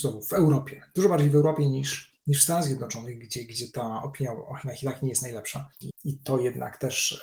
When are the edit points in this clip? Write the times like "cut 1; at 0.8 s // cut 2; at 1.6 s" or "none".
cut 1; at 5.8 s